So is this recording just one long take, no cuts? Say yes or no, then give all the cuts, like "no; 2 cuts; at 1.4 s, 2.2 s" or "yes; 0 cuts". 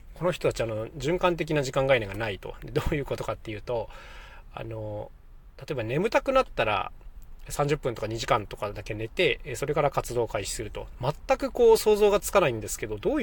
no; 1 cut; at 10.9 s